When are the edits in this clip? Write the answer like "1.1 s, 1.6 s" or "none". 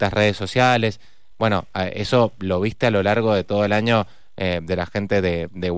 1.3 s